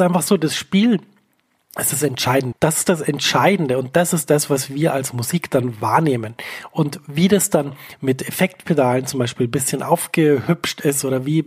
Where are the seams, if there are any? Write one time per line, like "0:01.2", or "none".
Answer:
0:02.5